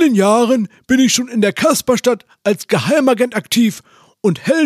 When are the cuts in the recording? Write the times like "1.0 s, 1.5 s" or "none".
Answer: none